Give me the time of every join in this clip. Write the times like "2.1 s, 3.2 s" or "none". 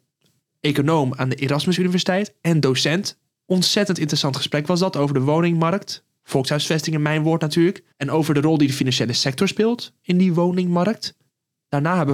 7.9 s